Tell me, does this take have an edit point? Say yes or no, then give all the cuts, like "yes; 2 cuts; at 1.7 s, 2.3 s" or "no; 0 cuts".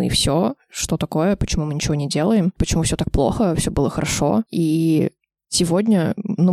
no; 0 cuts